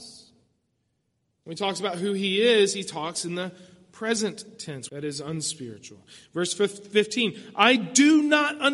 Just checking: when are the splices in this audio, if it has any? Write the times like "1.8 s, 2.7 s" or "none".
4.9 s